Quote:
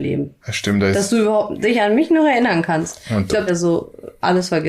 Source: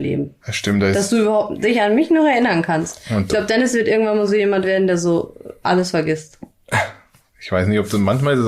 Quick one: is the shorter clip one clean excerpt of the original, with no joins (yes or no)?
no